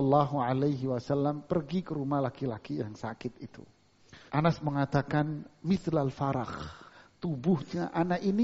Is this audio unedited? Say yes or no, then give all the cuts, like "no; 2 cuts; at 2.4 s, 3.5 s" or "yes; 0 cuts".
no; 1 cut; at 4.3 s